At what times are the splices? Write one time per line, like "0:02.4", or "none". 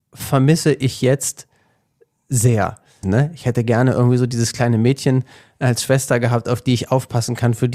0:03.0

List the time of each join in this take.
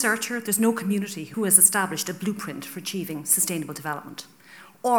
0:01.3

